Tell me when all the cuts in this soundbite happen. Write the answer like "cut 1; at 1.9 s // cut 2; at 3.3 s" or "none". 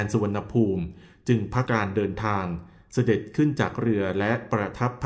cut 1; at 1.7 s